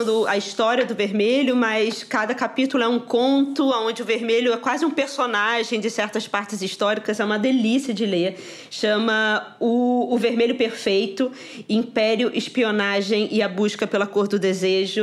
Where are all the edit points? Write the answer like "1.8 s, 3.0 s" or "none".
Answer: none

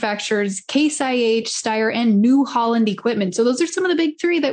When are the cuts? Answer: none

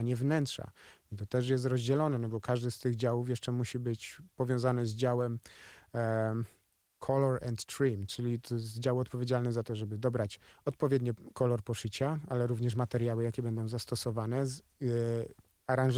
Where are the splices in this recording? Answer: 8.1 s

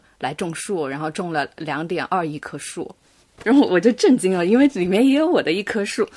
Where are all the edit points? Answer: 3.7 s

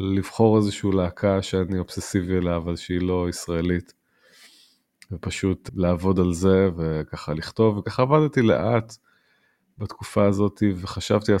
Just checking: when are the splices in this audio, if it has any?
5.7 s

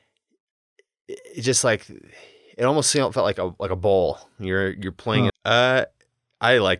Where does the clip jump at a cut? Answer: 5.3 s

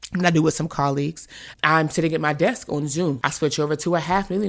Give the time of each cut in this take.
1.5 s, 3.2 s

